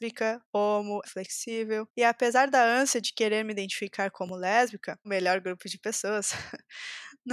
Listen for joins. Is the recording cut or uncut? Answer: cut